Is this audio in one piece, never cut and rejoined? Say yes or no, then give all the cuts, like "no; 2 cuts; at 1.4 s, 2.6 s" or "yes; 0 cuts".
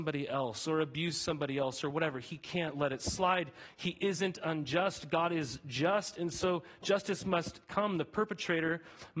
yes; 0 cuts